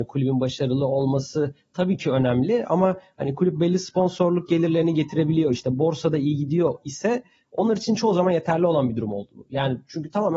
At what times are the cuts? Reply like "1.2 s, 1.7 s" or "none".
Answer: none